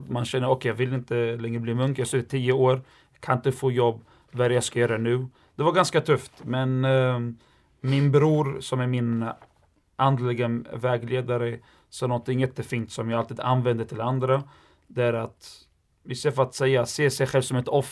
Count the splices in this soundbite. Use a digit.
0